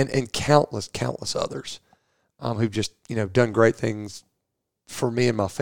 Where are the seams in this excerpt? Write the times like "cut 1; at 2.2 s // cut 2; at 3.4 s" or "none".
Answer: none